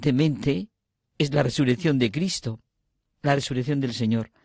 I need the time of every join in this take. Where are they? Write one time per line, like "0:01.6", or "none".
none